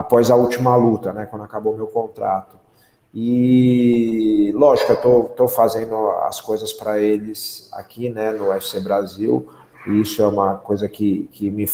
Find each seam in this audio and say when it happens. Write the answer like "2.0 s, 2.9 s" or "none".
none